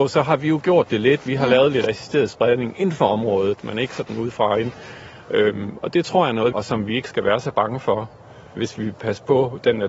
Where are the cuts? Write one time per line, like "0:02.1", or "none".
0:06.5
0:08.6